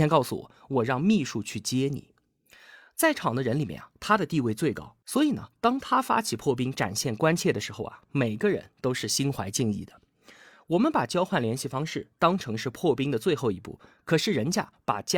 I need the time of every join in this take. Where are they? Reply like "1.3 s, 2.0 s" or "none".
none